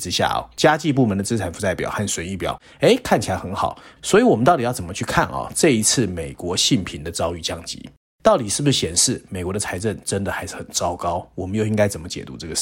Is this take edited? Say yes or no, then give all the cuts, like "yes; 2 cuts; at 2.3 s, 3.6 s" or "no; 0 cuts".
yes; 1 cut; at 4.0 s